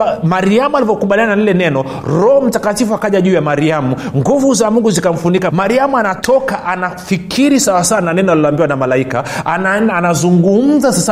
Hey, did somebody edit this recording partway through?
yes; 1 cut; at 5.5 s

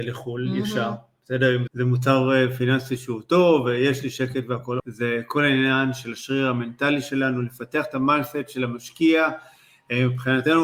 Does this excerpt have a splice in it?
yes; 2 cuts; at 1.7 s, 4.8 s

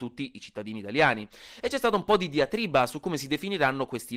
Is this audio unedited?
yes; 0 cuts

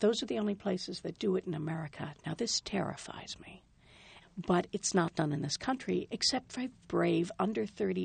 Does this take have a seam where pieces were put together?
yes; 2 cuts; at 4.2 s, 6.8 s

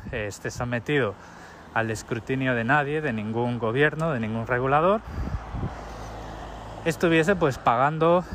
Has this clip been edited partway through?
no; 0 cuts

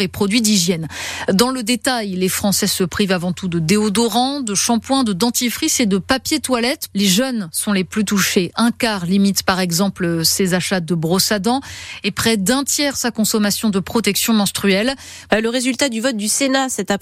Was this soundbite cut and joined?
yes; 1 cut; at 15.3 s

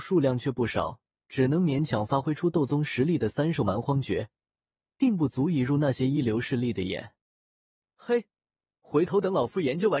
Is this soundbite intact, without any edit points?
yes; 0 cuts

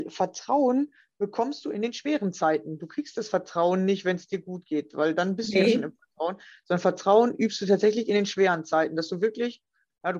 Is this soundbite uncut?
yes; 0 cuts

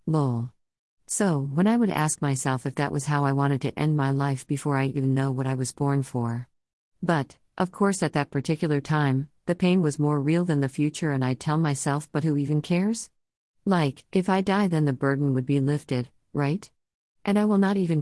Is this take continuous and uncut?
yes; 0 cuts

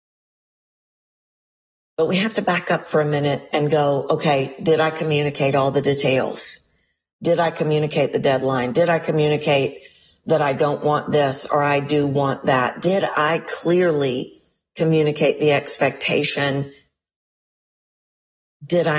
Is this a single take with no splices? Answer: yes; 0 cuts

